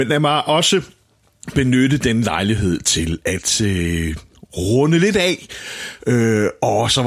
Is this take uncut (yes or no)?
no